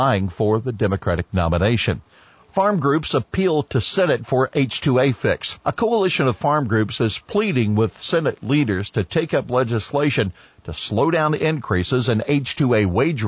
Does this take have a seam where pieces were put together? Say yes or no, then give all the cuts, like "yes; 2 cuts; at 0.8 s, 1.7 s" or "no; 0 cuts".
yes; 2 cuts; at 2.3 s, 5.6 s